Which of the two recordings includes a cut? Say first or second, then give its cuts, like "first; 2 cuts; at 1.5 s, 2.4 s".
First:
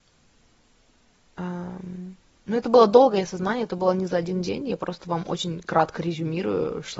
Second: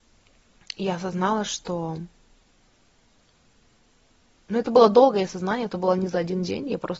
second; 1 cut; at 4.3 s